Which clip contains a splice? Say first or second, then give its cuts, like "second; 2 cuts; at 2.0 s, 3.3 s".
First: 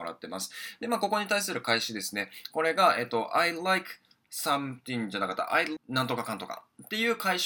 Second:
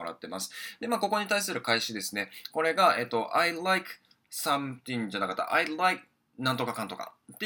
first; 1 cut; at 5.8 s